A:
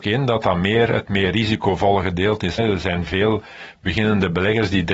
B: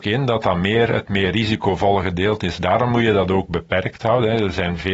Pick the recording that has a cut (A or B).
A